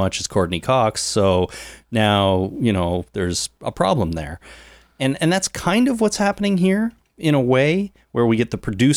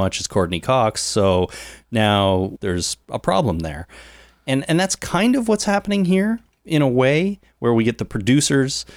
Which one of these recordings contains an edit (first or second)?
second